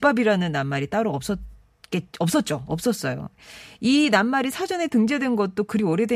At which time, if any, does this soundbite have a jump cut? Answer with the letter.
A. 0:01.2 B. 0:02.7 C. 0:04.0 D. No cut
D